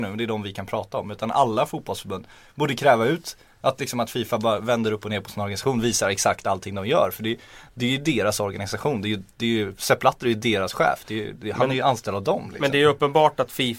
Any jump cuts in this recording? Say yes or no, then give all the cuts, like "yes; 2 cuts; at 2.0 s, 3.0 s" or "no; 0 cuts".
no; 0 cuts